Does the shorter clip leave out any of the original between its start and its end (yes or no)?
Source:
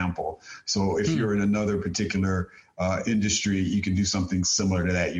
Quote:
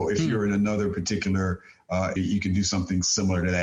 yes